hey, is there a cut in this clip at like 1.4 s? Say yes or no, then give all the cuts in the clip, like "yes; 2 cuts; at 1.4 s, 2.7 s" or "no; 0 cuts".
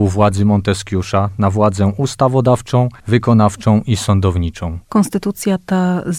no; 1 cut; at 4.8 s